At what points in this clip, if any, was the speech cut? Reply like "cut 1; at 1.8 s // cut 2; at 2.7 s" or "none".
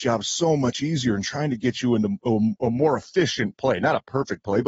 none